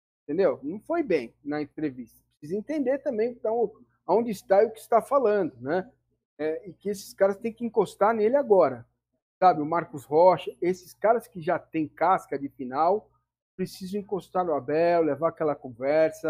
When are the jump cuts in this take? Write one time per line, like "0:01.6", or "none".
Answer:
none